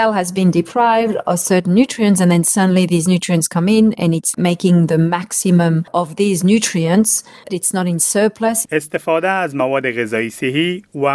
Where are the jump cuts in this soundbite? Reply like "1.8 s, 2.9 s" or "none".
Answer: 7.5 s, 8.6 s